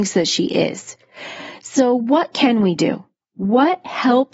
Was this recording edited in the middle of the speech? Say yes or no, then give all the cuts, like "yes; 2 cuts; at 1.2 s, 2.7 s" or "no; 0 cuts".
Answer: no; 0 cuts